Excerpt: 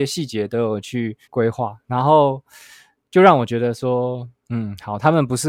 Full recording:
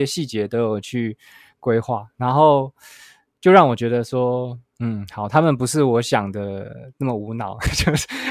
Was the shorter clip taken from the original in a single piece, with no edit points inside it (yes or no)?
no